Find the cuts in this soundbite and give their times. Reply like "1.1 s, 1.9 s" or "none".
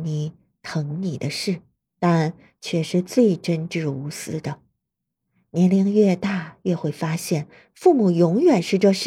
1.9 s